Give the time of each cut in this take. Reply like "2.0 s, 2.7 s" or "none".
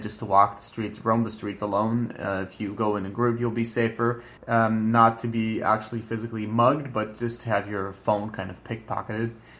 4.4 s